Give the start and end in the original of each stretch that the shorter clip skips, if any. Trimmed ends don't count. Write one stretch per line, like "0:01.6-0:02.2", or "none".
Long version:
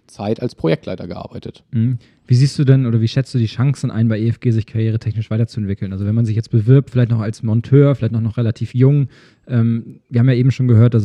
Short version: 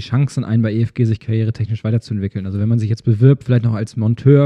none